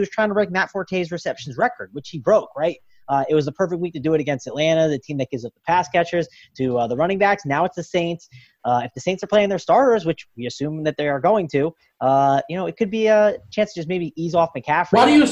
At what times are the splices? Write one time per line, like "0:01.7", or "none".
none